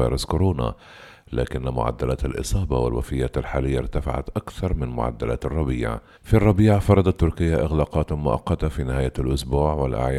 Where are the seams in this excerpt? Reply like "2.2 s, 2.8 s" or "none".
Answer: 6.1 s